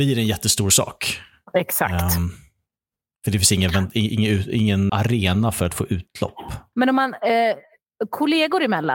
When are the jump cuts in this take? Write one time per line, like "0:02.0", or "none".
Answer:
0:04.9
0:06.7